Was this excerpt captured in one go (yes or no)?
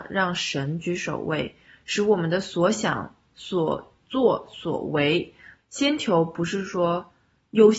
no